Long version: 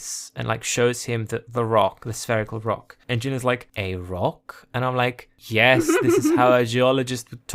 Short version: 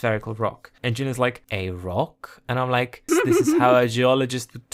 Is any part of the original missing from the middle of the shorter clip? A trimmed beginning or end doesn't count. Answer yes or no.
yes